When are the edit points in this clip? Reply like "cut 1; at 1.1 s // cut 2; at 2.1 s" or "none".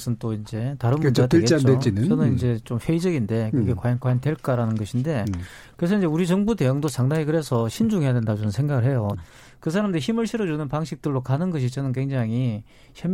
cut 1; at 4.0 s // cut 2; at 9.1 s